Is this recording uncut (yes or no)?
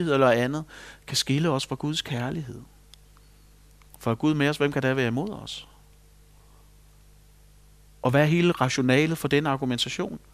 yes